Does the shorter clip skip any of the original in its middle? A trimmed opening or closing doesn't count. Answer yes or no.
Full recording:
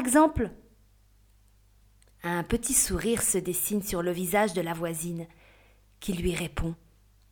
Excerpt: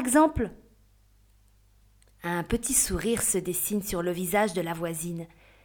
no